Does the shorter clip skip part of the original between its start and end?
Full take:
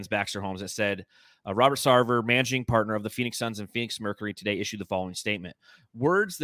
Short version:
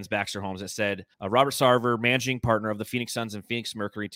yes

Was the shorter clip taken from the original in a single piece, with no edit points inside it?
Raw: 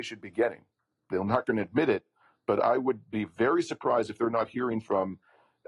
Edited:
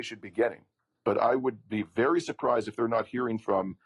no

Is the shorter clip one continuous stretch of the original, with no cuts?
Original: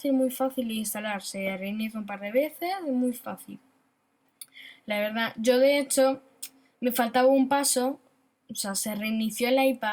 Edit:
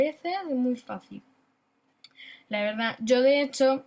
yes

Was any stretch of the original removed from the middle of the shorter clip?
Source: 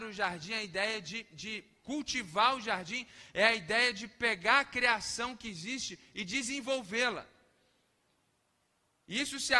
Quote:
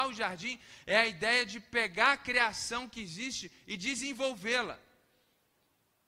no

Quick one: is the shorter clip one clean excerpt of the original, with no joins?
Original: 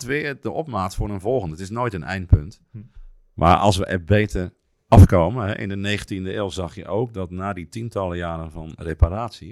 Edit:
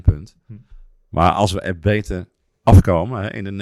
yes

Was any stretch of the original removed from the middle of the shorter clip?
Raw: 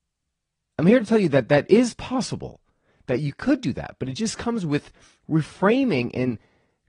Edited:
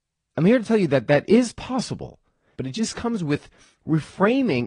yes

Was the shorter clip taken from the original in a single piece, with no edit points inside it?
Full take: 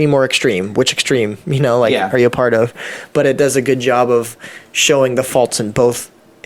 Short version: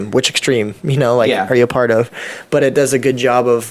yes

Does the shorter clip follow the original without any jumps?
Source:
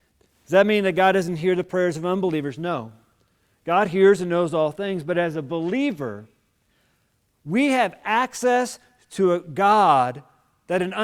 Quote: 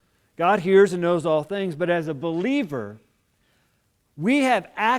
yes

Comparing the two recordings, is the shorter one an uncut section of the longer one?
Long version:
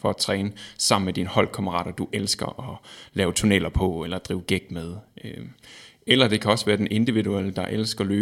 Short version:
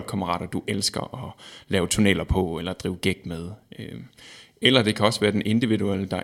yes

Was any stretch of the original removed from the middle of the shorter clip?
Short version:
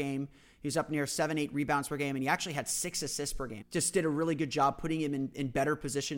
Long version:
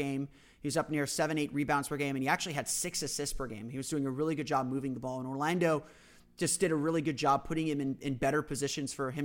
yes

